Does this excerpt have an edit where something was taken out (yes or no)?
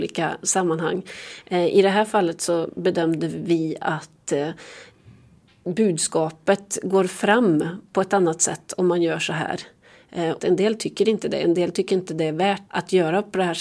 yes